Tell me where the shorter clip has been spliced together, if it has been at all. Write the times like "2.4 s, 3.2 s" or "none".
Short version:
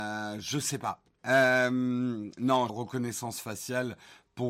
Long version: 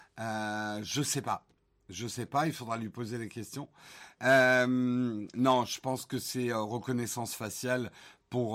1.2 s, 2.7 s